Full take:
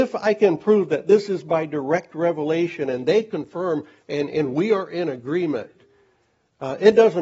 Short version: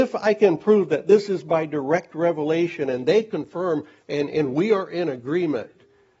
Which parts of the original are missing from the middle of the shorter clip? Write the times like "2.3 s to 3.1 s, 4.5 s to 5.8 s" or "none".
none